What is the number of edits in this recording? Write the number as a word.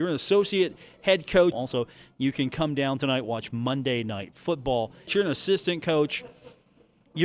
two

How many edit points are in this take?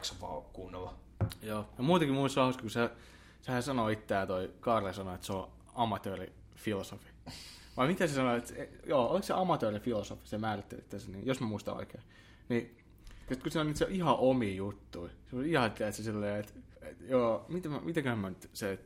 two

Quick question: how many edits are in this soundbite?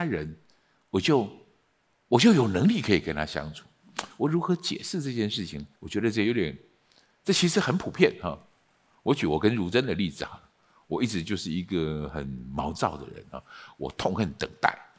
one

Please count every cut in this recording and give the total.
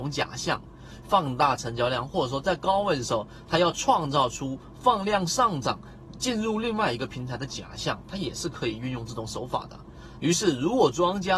two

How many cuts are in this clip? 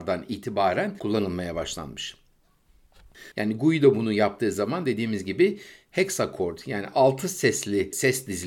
one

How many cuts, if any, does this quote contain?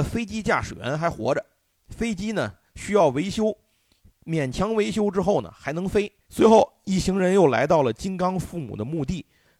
one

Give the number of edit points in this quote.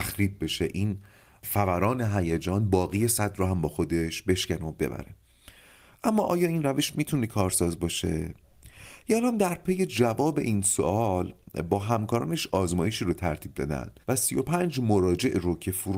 one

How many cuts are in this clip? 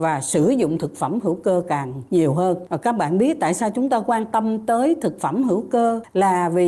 one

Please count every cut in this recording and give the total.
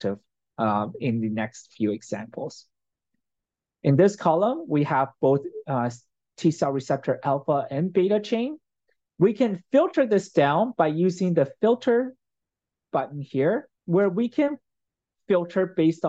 two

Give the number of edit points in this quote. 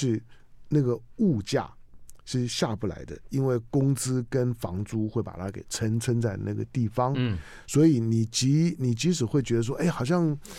zero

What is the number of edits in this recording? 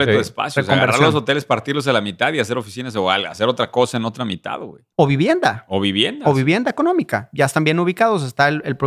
one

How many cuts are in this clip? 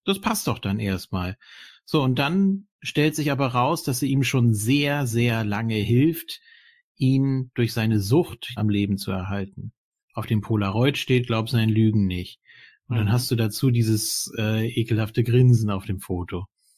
two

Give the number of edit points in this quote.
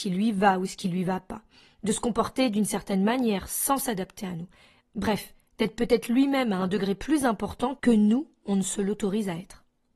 zero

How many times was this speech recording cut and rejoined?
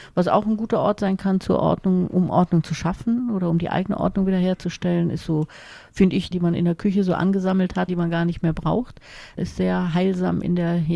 three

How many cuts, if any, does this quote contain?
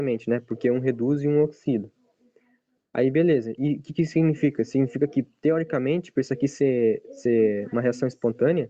zero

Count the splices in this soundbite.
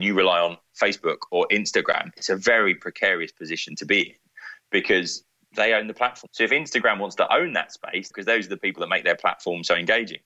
two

